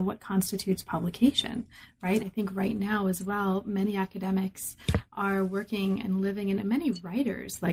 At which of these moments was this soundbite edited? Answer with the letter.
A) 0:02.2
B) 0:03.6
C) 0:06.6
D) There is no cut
A